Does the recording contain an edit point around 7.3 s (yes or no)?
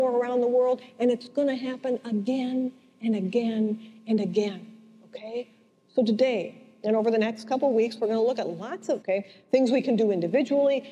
no